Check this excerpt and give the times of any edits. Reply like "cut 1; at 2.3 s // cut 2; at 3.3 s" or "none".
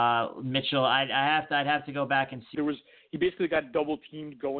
cut 1; at 2.5 s